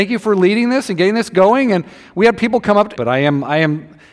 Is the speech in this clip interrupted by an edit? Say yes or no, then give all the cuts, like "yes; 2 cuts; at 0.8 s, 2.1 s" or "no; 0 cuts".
yes; 1 cut; at 3.0 s